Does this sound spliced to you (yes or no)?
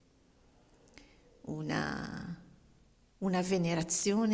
no